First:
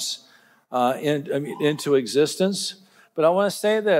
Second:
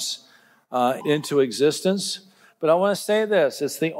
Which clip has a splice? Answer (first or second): second